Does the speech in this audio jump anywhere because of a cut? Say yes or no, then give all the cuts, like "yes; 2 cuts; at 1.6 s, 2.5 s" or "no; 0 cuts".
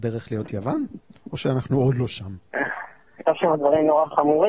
yes; 1 cut; at 3.2 s